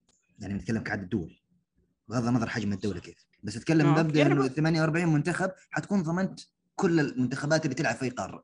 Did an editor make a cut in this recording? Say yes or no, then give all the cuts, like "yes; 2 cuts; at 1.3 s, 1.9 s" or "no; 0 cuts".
yes; 1 cut; at 3.3 s